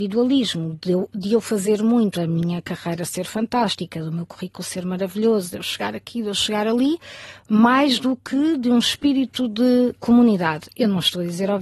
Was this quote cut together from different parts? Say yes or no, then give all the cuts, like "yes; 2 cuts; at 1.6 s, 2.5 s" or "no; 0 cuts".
yes; 1 cut; at 2.1 s